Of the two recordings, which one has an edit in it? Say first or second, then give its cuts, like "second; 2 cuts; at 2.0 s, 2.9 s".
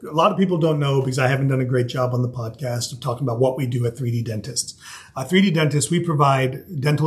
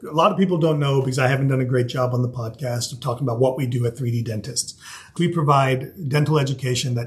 second; 1 cut; at 5.2 s